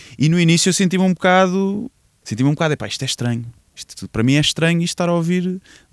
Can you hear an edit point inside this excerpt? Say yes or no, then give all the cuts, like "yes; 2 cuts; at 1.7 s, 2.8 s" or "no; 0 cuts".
yes; 1 cut; at 2.2 s